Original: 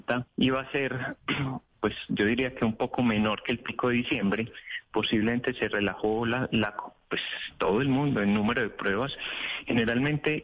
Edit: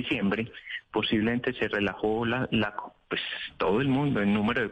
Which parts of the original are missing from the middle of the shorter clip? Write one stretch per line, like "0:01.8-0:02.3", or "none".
none